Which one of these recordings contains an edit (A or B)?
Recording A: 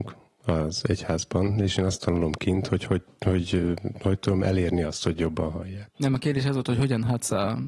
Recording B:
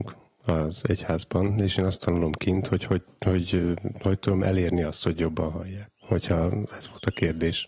A